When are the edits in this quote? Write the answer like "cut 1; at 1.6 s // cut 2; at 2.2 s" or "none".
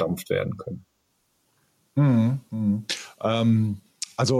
none